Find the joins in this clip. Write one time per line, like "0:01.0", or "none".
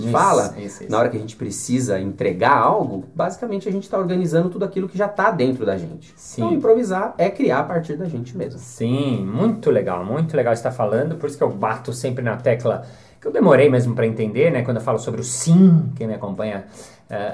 none